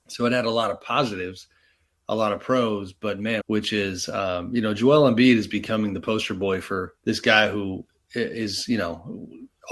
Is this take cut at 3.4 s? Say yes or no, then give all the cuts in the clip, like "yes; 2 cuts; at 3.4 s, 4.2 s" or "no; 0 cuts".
yes; 2 cuts; at 3.4 s, 7.0 s